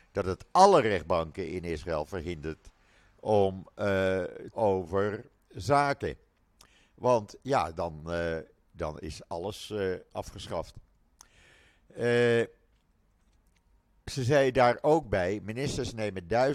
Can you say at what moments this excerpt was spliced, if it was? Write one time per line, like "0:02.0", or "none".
0:04.5